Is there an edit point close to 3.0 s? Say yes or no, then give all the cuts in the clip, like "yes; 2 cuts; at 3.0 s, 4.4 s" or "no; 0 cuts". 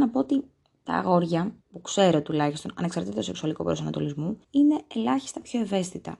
no; 2 cuts; at 1.6 s, 4.4 s